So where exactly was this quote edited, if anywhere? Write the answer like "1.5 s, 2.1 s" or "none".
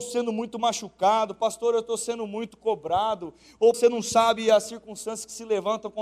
3.7 s